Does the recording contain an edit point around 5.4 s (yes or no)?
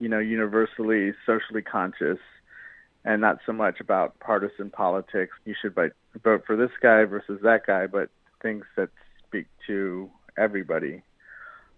yes